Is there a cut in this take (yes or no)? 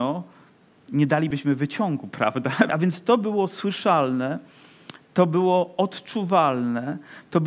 yes